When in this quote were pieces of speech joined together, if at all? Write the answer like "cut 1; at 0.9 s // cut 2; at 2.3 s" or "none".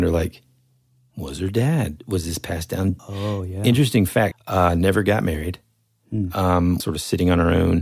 cut 1; at 3.0 s // cut 2; at 4.3 s // cut 3; at 6.8 s